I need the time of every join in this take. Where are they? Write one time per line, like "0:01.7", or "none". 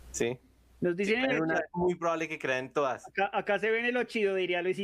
none